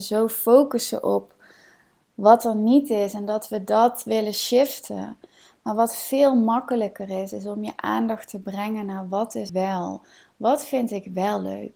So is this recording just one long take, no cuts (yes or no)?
no